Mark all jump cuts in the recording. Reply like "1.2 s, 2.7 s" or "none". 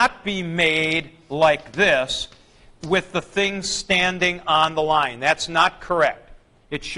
none